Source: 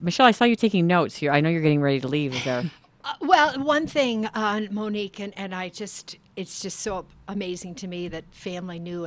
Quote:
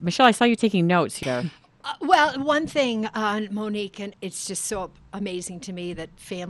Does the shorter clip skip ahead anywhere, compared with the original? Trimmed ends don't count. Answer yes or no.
yes